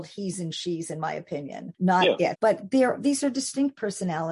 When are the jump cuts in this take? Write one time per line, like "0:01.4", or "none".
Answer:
0:02.3

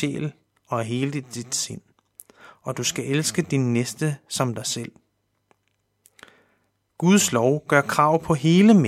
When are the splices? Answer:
none

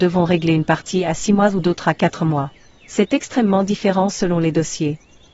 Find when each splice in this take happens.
none

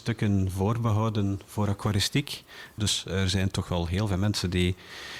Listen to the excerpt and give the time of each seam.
0:02.8

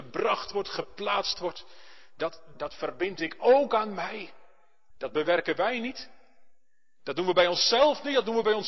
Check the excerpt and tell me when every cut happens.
0:02.5
0:04.9

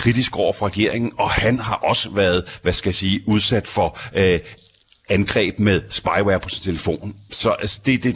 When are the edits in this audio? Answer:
none

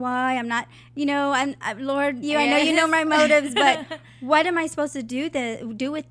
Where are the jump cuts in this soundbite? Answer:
0:02.2

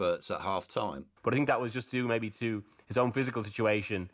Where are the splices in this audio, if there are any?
0:01.2

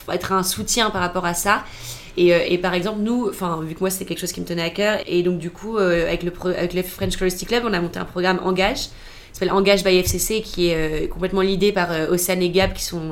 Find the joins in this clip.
0:05.0

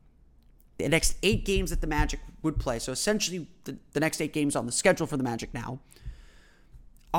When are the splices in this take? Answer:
none

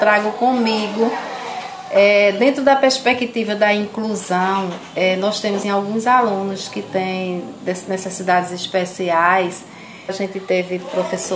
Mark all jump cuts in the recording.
0:05.6
0:10.1

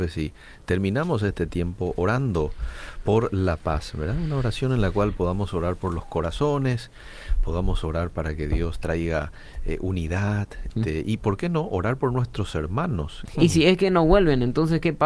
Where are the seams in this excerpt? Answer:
0:10.7
0:13.3

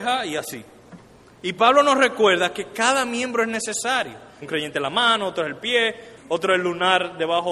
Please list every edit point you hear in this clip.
0:01.3
0:04.4
0:06.2

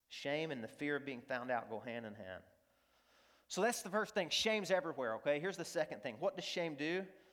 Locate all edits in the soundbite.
none

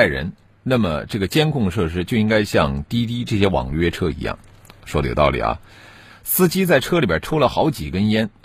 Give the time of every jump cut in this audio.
0:06.1

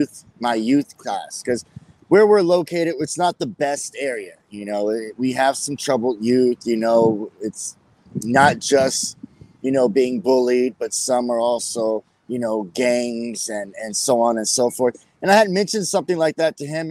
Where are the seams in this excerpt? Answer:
none

